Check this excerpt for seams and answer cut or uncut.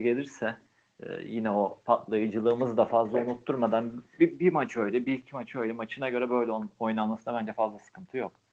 uncut